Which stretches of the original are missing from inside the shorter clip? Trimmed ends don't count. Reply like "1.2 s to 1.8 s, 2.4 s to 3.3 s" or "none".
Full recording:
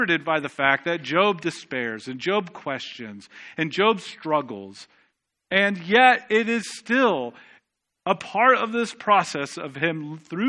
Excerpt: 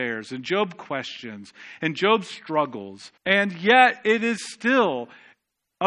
4.9 s to 5.4 s